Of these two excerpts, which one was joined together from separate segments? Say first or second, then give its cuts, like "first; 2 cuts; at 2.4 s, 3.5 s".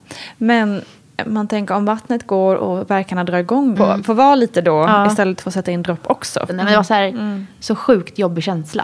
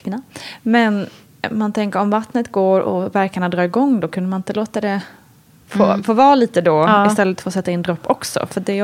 first; 2 cuts; at 3.8 s, 6.5 s